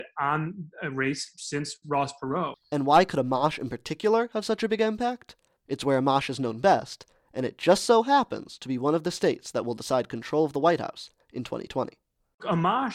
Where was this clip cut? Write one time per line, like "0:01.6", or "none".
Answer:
0:05.6